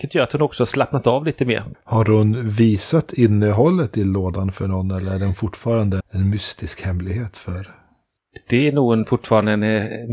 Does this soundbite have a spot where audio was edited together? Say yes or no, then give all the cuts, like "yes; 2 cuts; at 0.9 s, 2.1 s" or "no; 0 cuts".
yes; 2 cuts; at 1.7 s, 6.0 s